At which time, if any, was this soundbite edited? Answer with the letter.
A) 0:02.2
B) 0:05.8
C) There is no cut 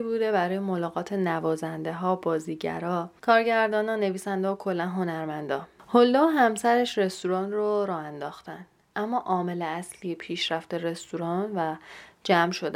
B